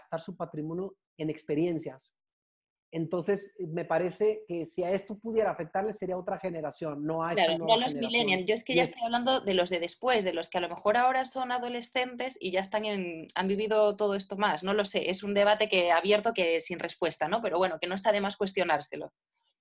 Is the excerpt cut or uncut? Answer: uncut